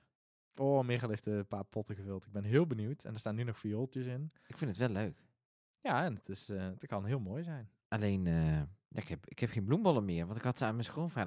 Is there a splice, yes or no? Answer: no